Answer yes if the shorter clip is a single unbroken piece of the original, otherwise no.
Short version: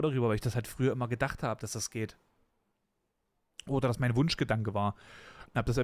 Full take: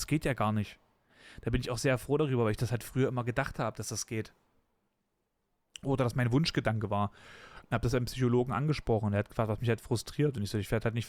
yes